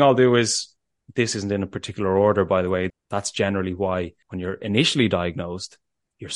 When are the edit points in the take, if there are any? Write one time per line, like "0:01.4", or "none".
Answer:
0:02.9
0:04.2